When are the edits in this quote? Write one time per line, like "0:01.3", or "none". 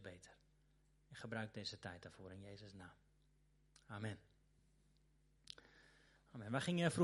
none